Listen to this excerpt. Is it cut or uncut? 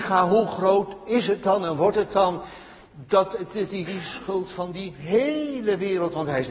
uncut